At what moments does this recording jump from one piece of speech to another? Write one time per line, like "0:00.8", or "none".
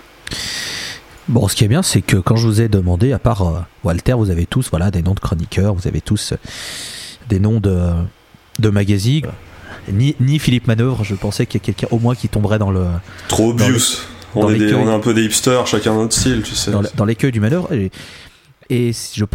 0:09.2
0:17.7